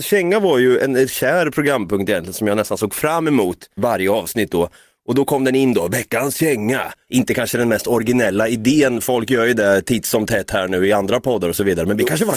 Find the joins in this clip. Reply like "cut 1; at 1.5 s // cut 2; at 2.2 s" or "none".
cut 1; at 3.8 s // cut 2; at 7.1 s